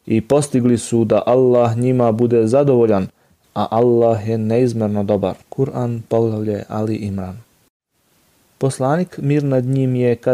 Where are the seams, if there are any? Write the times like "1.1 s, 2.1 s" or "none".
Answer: 5.4 s